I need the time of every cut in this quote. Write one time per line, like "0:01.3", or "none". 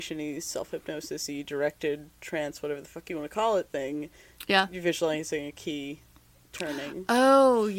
none